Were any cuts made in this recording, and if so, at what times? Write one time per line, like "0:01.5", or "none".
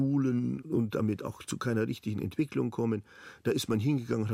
none

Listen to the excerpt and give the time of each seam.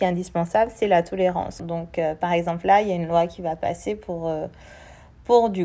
0:01.6

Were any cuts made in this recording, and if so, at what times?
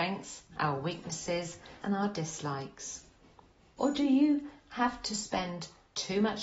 0:01.8
0:03.8

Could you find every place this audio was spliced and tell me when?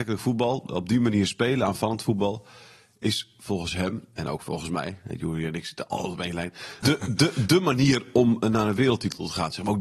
0:06.8

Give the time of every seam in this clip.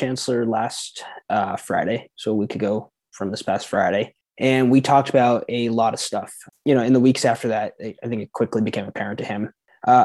0:06.5

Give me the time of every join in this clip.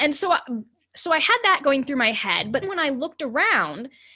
0:02.6

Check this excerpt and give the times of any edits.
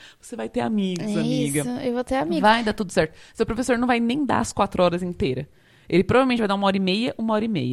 none

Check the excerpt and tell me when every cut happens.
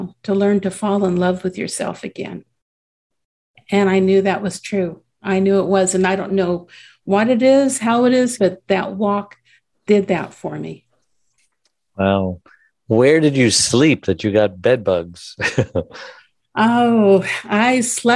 0:08.4

